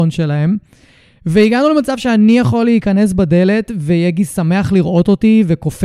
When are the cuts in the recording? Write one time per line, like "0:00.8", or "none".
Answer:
none